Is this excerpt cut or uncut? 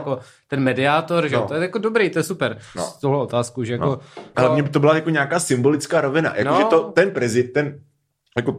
cut